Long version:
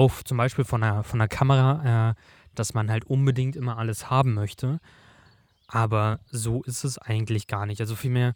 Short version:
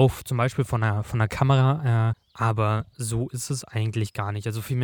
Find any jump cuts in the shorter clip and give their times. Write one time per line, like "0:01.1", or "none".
0:02.1